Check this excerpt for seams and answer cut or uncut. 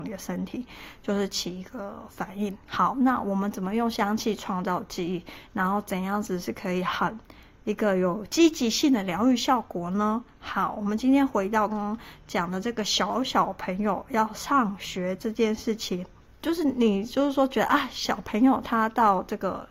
cut